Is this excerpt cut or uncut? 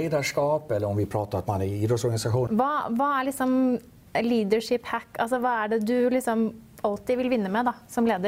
cut